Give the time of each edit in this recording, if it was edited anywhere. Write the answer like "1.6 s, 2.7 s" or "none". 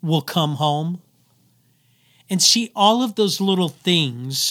none